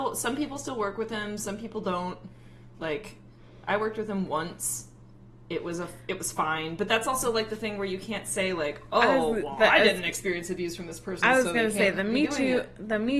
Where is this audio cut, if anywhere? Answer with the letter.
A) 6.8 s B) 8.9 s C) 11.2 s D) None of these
D